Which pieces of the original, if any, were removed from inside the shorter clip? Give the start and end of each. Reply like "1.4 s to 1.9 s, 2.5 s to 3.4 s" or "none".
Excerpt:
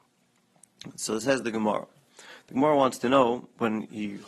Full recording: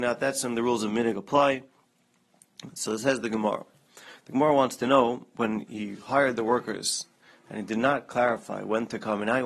none